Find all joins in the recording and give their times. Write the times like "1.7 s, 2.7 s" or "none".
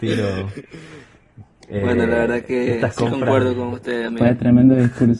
none

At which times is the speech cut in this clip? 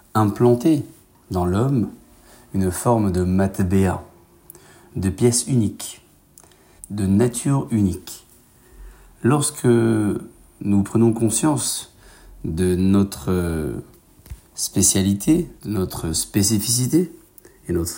6.8 s, 15.6 s

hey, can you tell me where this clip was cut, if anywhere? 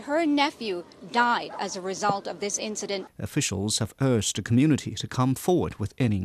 3.1 s

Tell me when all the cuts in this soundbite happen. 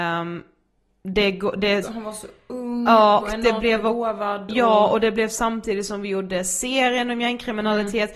1.8 s, 3.2 s

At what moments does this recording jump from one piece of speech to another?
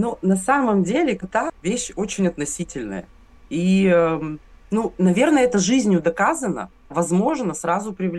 1.2 s, 6.9 s

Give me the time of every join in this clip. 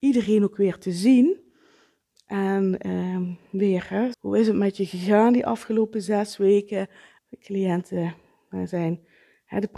4.1 s, 7.2 s

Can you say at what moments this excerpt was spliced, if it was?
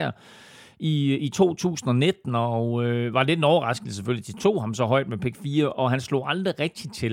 4.4 s

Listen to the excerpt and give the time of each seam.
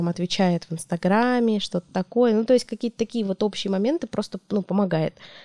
none

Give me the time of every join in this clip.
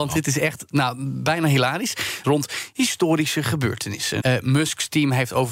2.2 s, 4.2 s

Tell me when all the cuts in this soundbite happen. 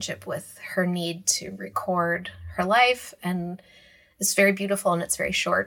none

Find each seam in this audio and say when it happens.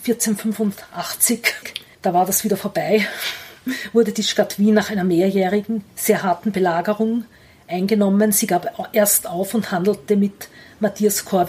none

